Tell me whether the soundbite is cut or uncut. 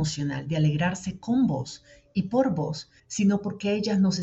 cut